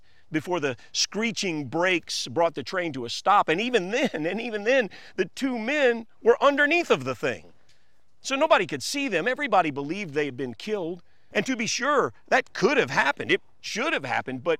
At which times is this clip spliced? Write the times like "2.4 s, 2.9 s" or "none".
11.3 s, 13.6 s